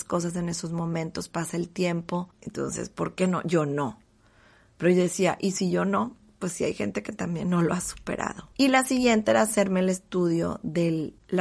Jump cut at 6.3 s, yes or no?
no